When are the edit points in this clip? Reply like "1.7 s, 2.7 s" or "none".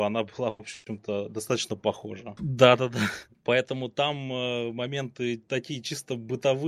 2.4 s